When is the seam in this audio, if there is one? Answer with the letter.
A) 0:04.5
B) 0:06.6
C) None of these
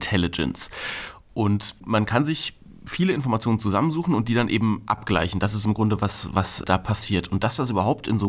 B